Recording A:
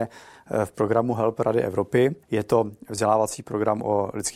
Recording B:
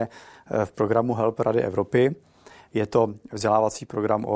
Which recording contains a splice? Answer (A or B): A